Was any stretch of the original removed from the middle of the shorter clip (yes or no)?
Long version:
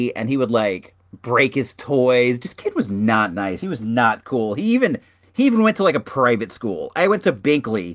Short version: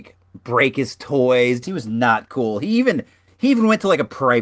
yes